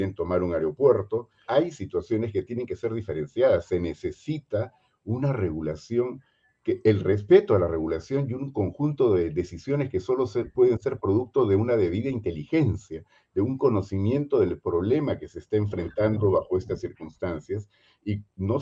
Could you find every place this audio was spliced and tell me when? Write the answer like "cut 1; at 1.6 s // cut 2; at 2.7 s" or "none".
cut 1; at 1.5 s